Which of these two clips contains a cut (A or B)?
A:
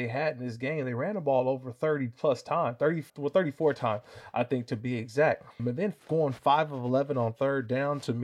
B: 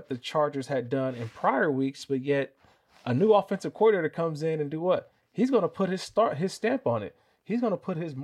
A